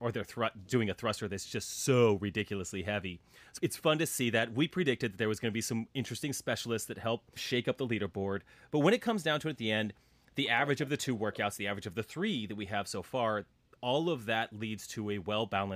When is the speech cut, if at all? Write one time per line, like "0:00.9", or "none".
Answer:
none